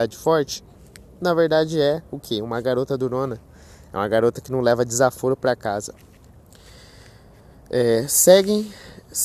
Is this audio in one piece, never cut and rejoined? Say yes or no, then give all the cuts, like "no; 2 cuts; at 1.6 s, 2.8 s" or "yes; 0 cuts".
yes; 0 cuts